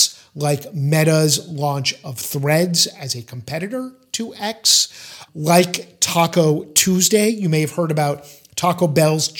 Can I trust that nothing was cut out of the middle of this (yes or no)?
yes